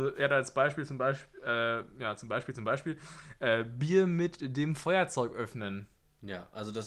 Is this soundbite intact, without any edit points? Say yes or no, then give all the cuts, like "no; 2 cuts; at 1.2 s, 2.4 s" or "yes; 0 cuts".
yes; 0 cuts